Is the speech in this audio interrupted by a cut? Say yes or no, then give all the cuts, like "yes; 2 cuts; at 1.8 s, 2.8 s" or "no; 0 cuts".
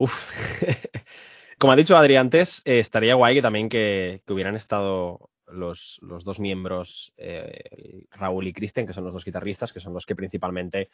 yes; 1 cut; at 1.6 s